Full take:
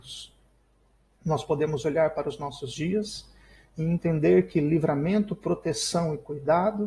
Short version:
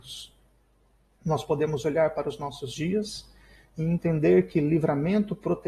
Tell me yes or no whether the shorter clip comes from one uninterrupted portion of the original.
yes